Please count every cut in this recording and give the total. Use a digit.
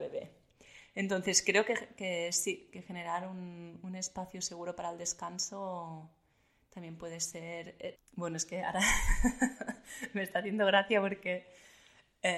1